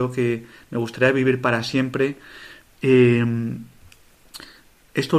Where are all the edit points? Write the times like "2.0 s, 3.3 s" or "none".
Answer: 2.7 s